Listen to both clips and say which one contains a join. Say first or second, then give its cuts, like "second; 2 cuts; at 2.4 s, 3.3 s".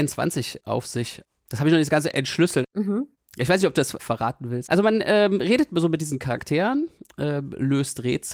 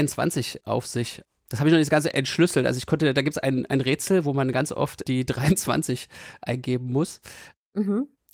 first; 1 cut; at 2.6 s